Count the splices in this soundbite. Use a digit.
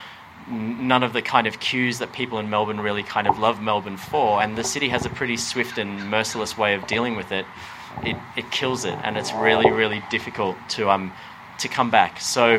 0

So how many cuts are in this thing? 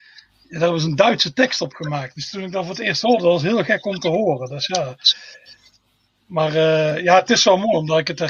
0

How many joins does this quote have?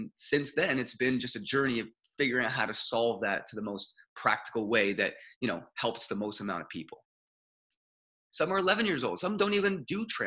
1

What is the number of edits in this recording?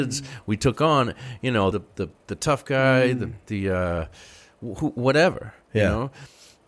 1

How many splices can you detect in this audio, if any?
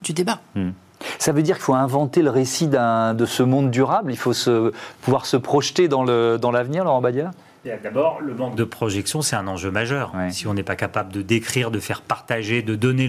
0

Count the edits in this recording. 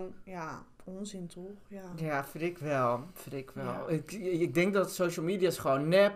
0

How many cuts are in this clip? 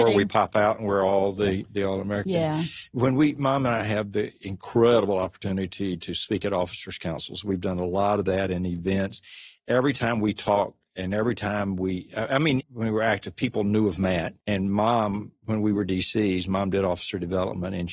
2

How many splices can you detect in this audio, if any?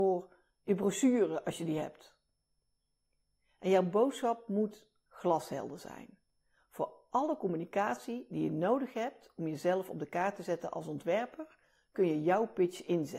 0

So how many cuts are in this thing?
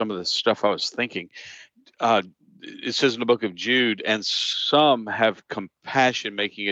0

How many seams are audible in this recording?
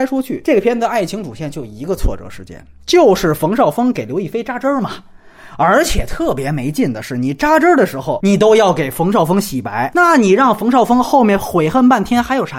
1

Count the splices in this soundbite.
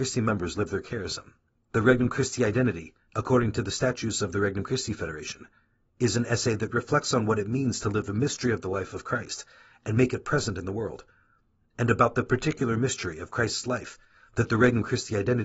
1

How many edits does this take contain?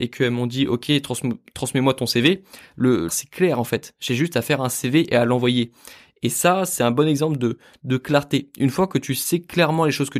1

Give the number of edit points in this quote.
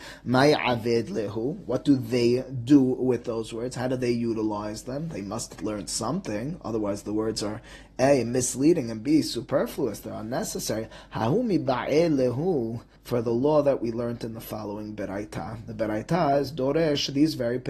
1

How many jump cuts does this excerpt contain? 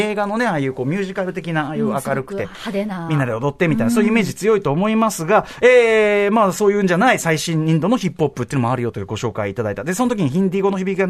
0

